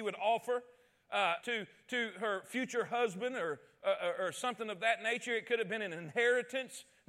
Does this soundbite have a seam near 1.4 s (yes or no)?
yes